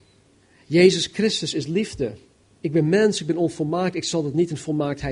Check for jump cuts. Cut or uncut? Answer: cut